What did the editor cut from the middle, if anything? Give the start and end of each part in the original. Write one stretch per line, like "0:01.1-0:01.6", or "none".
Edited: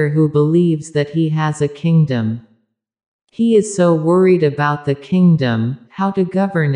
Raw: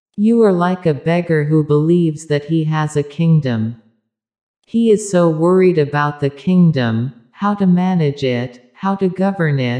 0:07.2-0:08.7